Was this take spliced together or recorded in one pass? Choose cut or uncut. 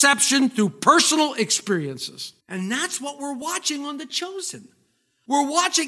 cut